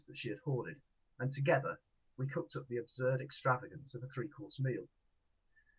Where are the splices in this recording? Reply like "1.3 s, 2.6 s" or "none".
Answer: none